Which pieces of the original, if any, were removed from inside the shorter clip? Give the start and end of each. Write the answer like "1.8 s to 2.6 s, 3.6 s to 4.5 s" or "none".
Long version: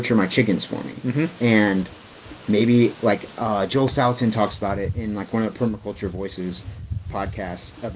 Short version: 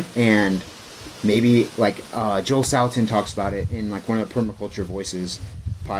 none